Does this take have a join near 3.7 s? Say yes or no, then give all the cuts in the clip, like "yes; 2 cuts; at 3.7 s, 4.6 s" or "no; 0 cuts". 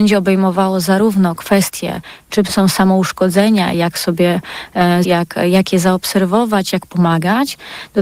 no; 1 cut; at 5.0 s